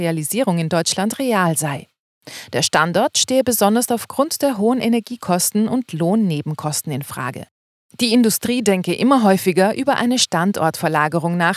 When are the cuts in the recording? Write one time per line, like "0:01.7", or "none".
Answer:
none